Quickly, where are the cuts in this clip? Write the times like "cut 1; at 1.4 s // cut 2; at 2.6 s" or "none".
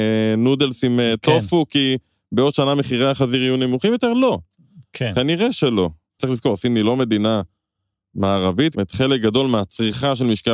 cut 1; at 6.2 s // cut 2; at 8.7 s

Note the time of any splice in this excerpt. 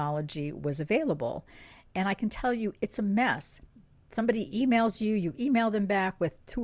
none

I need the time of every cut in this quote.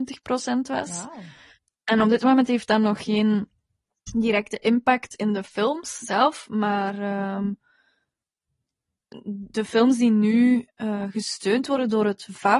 none

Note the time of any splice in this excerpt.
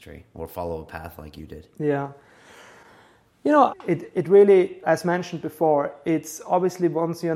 cut 1; at 3.7 s // cut 2; at 4.8 s

